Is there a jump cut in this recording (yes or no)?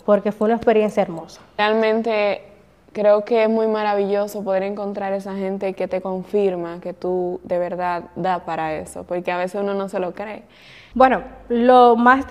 yes